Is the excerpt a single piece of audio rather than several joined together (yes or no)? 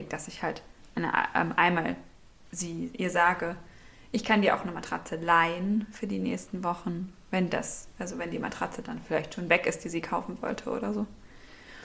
yes